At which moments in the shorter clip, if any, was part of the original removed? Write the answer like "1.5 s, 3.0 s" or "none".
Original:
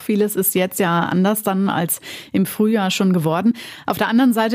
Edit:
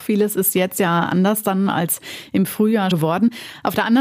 2.9 s